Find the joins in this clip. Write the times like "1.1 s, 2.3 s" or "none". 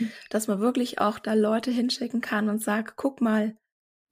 none